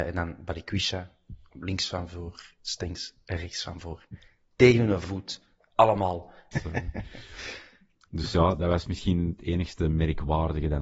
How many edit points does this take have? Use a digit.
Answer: 1